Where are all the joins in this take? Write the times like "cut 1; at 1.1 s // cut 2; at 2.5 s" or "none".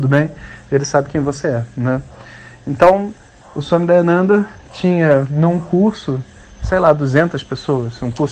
none